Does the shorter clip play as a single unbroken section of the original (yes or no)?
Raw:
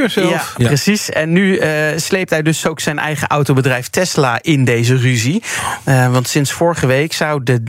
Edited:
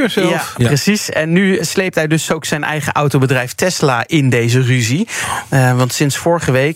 no